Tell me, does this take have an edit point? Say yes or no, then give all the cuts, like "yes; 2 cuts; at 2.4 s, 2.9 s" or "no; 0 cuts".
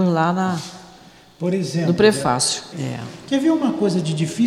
yes; 1 cut; at 2.7 s